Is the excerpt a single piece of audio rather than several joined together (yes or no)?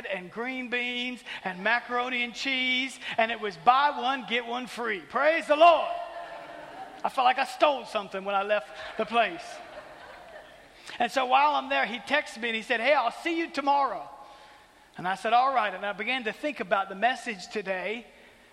yes